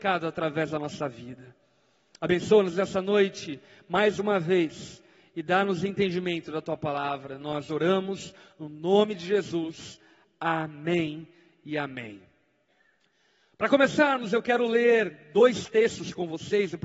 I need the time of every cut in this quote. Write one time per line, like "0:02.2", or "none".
none